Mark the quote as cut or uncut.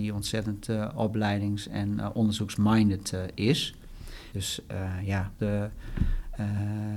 cut